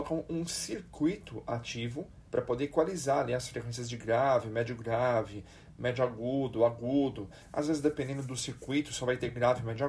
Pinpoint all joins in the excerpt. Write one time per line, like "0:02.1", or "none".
0:02.3